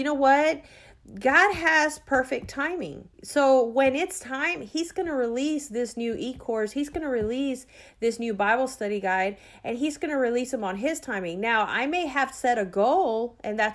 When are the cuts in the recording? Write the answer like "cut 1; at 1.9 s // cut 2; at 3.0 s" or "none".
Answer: cut 1; at 3.1 s

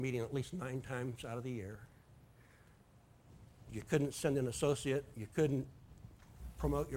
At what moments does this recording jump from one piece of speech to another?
cut 1; at 3.7 s

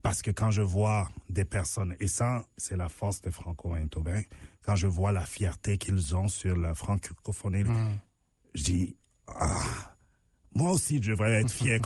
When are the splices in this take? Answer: cut 1; at 7.6 s

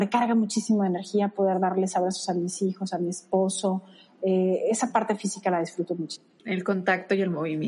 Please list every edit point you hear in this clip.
cut 1; at 6.4 s

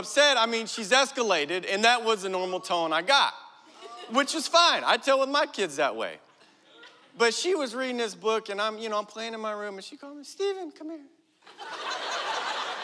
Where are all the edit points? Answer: none

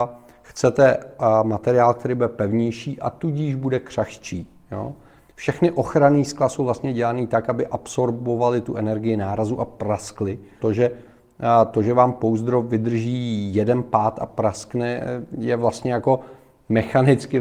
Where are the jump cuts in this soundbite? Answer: cut 1; at 10.6 s

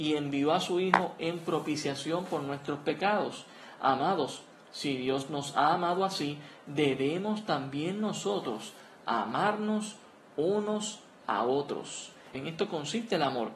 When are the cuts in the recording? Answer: cut 1; at 12.3 s

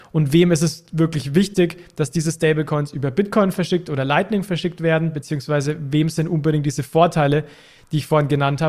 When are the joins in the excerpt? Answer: none

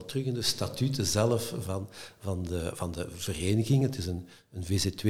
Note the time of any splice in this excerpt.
none

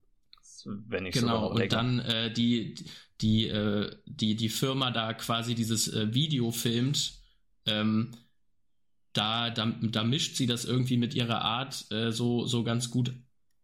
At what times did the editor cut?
cut 1; at 9.5 s

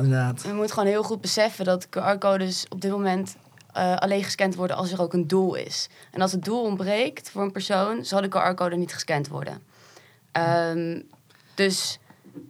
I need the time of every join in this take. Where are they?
none

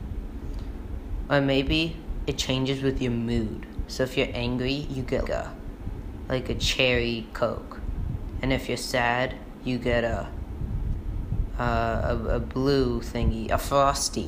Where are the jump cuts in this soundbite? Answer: cut 1; at 5.2 s

